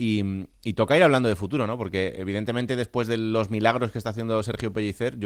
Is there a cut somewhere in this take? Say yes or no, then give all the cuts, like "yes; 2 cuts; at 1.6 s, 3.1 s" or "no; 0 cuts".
no; 0 cuts